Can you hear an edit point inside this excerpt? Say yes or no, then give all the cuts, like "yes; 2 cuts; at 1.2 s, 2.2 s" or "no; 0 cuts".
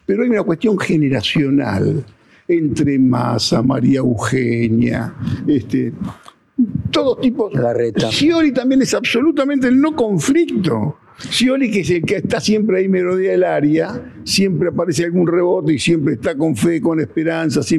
yes; 1 cut; at 8.1 s